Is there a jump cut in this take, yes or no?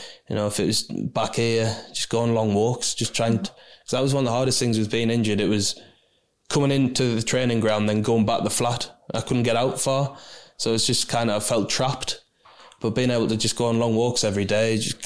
yes